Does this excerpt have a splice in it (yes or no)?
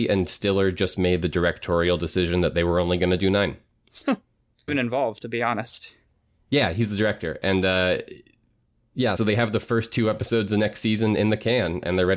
yes